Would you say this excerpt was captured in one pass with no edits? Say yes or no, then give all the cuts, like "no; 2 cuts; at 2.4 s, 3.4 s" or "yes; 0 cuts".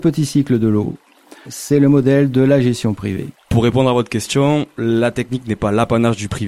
no; 2 cuts; at 1.5 s, 3.3 s